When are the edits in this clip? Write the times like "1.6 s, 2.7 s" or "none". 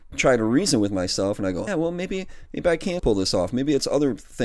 1.7 s, 3.0 s